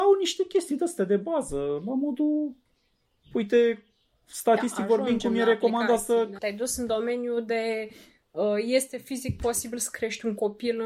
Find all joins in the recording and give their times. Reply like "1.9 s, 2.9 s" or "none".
6.4 s